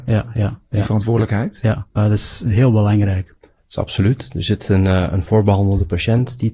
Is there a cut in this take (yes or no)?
yes